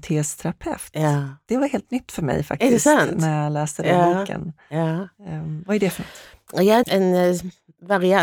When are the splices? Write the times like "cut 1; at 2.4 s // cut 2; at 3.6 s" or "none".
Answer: cut 1; at 6.8 s